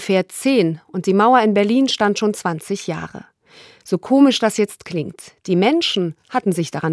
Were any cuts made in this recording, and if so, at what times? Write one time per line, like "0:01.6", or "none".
none